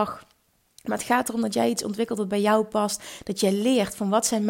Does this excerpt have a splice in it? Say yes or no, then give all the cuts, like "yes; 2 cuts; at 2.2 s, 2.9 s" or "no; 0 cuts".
no; 0 cuts